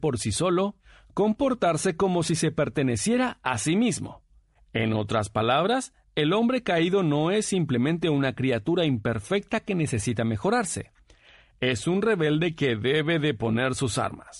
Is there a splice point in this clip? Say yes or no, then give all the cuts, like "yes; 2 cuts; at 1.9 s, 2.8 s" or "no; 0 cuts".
no; 0 cuts